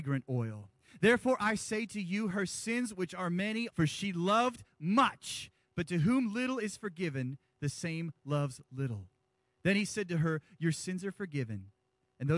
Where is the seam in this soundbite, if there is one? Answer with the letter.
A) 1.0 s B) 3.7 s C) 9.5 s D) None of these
B